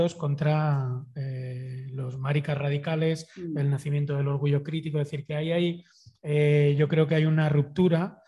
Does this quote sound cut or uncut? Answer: uncut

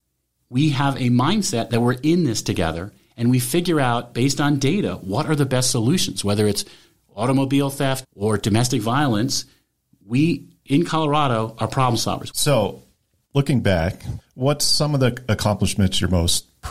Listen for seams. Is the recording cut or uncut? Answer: cut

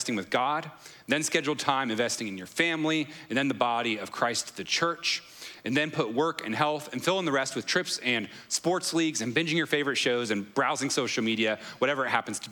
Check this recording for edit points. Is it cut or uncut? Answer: uncut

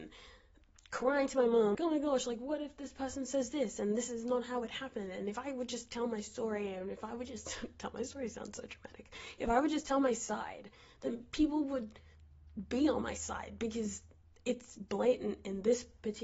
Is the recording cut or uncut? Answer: cut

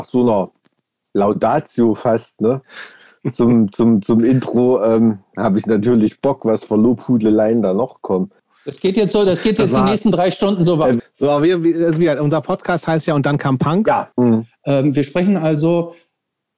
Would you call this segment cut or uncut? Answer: cut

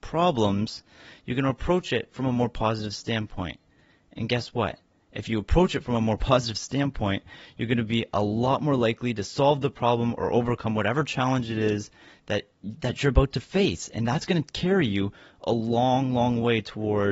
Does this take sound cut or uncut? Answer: uncut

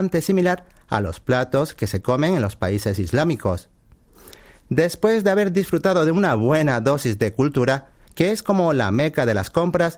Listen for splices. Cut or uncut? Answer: cut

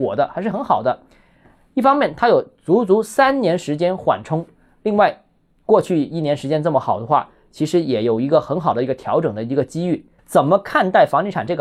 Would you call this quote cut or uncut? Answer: cut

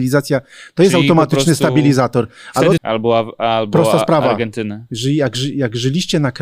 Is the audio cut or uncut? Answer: cut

